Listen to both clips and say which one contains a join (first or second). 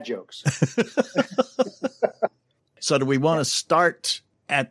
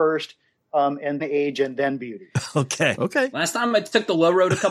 second